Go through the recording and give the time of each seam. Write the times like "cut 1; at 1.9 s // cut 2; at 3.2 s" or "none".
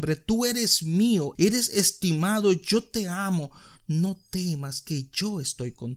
cut 1; at 1.3 s